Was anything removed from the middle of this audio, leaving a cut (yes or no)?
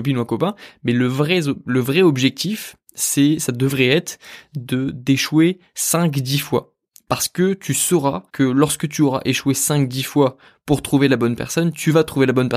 yes